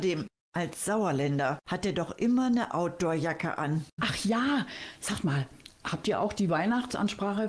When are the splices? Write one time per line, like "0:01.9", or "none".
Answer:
0:04.0